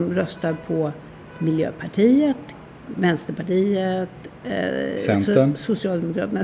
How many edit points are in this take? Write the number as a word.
zero